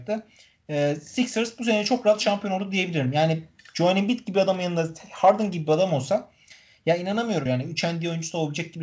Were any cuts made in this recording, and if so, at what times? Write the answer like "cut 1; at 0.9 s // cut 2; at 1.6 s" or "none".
cut 1; at 7.5 s